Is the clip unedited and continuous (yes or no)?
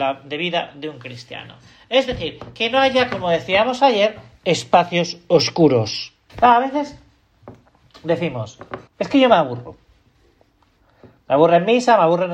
no